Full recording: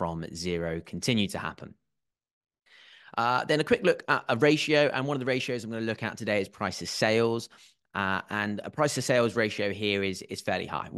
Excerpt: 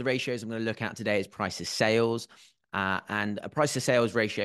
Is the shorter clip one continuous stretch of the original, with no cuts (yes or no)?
yes